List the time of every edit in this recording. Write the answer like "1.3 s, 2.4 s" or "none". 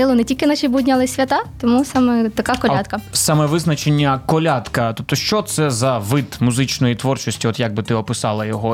none